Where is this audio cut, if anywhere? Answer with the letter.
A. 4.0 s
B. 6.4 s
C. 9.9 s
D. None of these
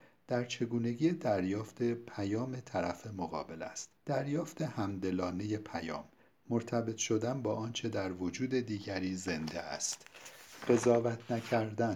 A